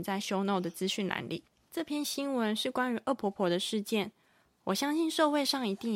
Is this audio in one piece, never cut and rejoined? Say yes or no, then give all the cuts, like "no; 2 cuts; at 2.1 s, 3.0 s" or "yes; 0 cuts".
yes; 0 cuts